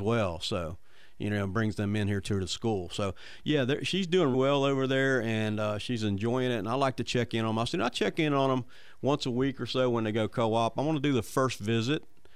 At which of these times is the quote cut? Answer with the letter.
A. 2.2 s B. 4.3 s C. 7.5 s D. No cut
B